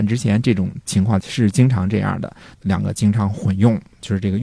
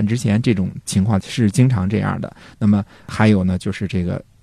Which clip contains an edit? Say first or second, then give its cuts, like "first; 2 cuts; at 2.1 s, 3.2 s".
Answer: first; 1 cut; at 2.5 s